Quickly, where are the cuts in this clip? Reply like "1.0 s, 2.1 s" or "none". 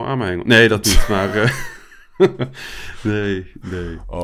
none